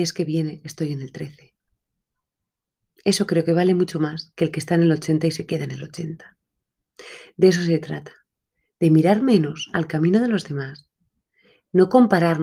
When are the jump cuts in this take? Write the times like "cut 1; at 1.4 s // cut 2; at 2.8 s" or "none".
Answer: none